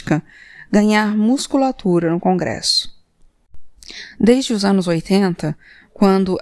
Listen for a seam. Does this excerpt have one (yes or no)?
no